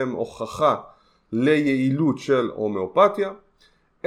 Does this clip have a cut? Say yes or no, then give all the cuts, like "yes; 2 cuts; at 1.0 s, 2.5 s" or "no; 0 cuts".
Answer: no; 0 cuts